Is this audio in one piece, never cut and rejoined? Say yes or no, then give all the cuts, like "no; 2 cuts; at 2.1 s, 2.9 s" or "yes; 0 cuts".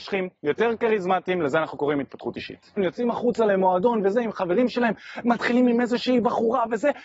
no; 1 cut; at 2.8 s